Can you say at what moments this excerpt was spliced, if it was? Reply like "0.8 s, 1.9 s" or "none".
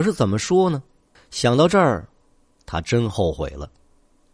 1.2 s